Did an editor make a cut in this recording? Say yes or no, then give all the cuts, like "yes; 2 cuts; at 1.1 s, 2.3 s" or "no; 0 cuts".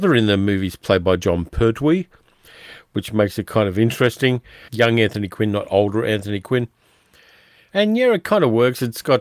yes; 1 cut; at 4.7 s